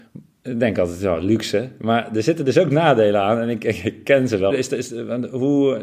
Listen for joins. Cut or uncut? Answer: cut